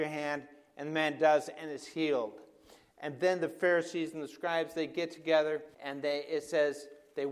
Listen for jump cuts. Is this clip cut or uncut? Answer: cut